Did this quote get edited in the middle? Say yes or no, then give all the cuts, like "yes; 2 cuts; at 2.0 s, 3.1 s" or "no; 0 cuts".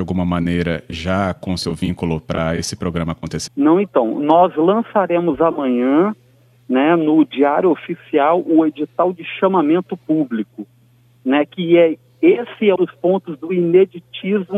yes; 2 cuts; at 3.5 s, 12.8 s